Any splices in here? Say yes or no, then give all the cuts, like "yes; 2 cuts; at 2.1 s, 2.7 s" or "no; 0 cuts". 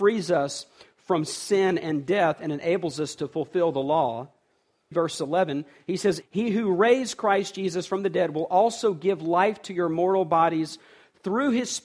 yes; 2 cuts; at 4.9 s, 6.2 s